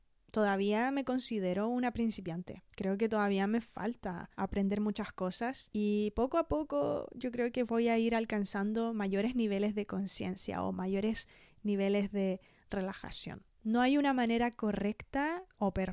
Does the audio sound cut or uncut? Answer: cut